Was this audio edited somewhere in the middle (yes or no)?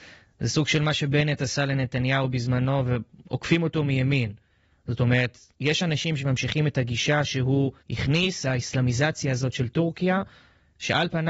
yes